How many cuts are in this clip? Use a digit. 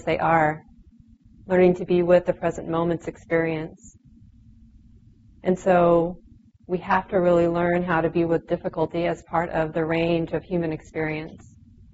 0